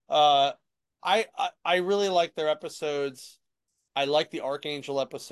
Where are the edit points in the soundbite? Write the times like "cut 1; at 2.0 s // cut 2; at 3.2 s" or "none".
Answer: none